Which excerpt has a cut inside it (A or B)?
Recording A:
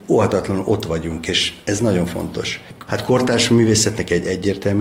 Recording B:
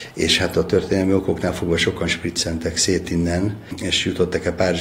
A